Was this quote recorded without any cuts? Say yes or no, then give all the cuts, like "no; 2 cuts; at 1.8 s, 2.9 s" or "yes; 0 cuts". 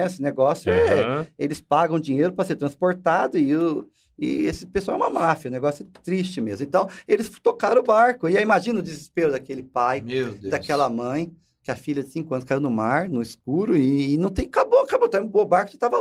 yes; 0 cuts